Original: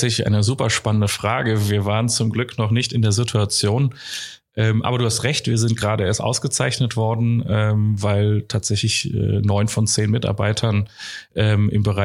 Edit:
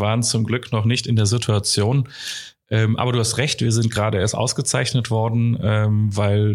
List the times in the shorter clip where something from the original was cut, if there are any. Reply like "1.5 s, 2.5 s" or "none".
none